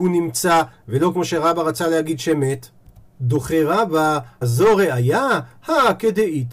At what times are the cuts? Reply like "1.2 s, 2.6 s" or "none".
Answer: 4.4 s